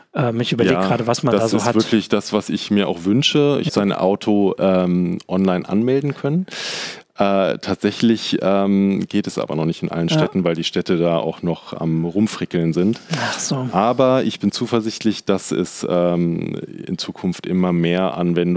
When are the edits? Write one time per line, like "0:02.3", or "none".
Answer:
0:03.7